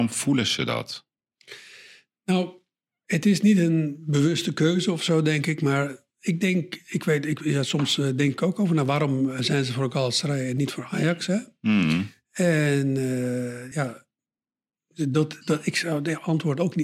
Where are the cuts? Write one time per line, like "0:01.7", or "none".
none